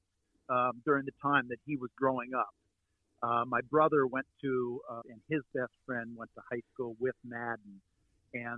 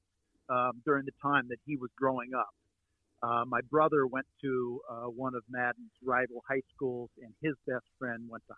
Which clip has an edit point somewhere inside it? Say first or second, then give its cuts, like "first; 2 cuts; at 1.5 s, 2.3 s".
first; 1 cut; at 5.0 s